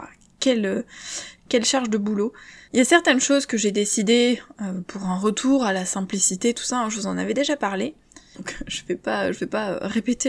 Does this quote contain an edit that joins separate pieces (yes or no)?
yes